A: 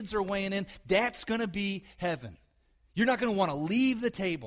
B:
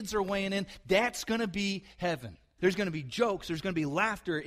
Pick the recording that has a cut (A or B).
B